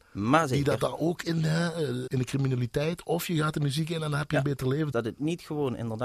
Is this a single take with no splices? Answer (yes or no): no